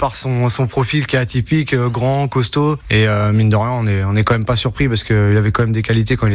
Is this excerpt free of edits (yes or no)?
yes